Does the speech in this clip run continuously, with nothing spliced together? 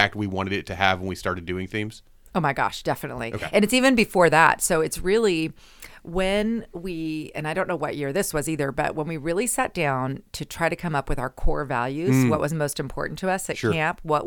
yes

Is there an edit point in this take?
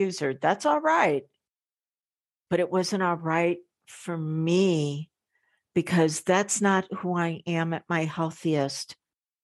no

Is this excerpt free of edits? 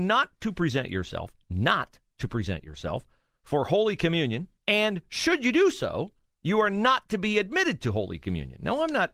no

